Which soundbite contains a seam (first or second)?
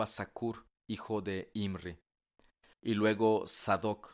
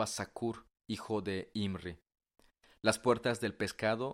first